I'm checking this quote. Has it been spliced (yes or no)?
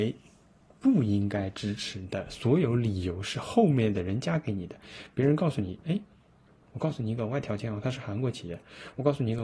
no